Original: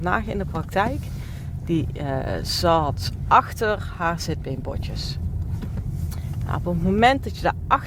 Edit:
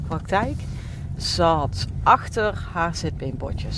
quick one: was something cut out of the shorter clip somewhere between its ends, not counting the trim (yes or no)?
yes